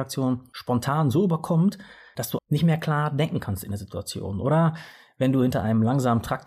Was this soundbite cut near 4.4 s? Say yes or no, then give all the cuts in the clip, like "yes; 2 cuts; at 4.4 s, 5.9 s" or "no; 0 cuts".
no; 1 cut; at 2.4 s